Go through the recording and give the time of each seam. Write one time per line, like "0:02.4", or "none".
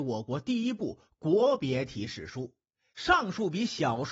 0:02.9